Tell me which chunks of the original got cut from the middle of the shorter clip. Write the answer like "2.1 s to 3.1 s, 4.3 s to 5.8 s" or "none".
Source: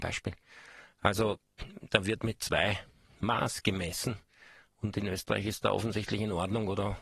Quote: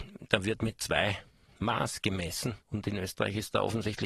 4.2 s to 4.7 s